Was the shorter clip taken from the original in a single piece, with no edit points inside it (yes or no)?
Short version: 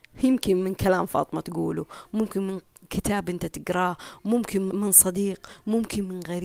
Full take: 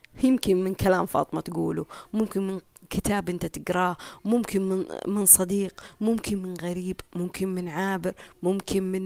no